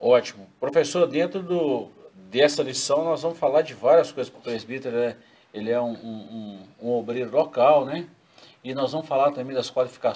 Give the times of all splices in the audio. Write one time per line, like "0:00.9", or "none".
0:04.3